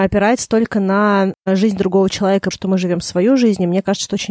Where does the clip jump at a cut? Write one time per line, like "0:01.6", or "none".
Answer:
0:02.5